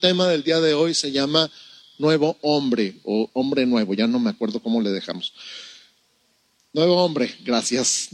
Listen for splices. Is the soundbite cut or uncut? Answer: uncut